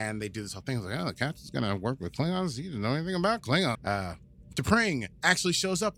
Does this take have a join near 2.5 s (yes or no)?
no